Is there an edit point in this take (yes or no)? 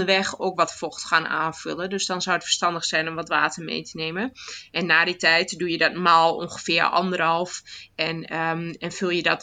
no